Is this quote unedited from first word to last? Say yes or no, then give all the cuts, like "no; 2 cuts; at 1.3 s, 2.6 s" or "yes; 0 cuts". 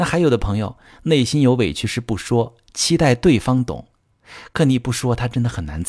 yes; 0 cuts